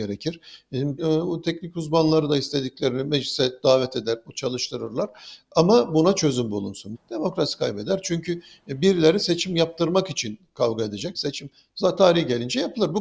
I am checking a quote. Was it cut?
yes; 3 cuts; at 1.0 s, 6.9 s, 11.1 s

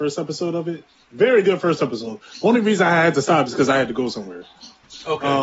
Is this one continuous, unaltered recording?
yes; 0 cuts

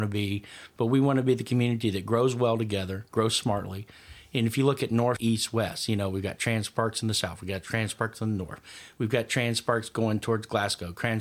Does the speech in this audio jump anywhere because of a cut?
yes; 1 cut; at 5.2 s

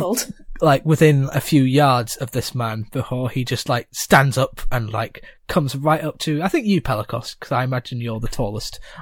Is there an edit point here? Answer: no; 0 cuts

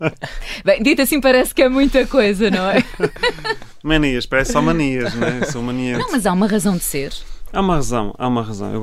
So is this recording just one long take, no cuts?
yes; 0 cuts

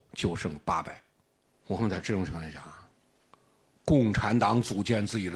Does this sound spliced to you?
yes; 1 cut; at 1.5 s

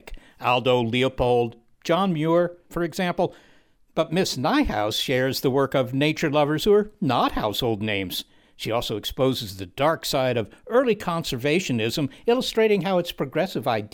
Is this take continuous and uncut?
no; 1 cut; at 2.7 s

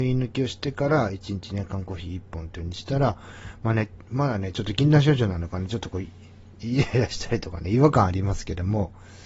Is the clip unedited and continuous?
yes; 0 cuts

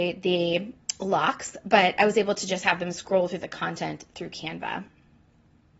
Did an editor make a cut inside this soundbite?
no; 0 cuts

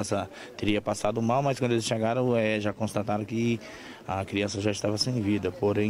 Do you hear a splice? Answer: no; 0 cuts

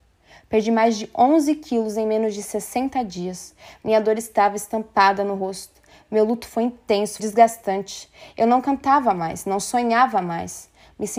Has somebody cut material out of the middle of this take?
yes; 1 cut; at 7.2 s

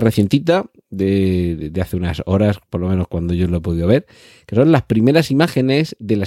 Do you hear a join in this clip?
no; 0 cuts

